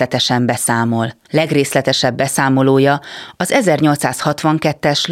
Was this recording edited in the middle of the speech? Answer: yes; 1 cut; at 1.3 s

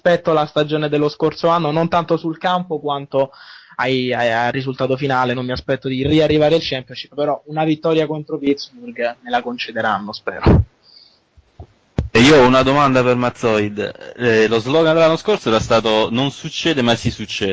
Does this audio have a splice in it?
no; 0 cuts

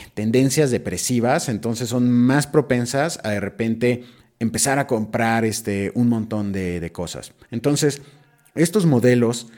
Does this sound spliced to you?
yes; 1 cut; at 7.4 s

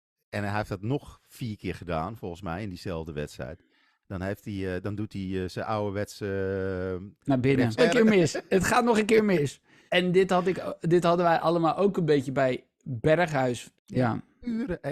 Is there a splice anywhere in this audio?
yes; 3 cuts; at 7.8 s, 9.9 s, 13.7 s

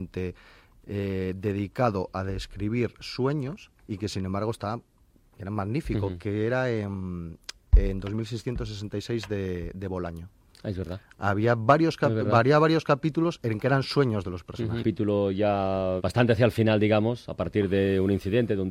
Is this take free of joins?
no; 3 cuts; at 3.8 s, 14.8 s, 16.0 s

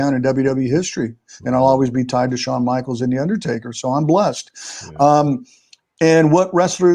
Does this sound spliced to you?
no; 0 cuts

